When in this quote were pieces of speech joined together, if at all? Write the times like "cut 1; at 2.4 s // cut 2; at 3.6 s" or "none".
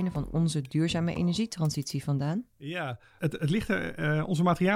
cut 1; at 3.2 s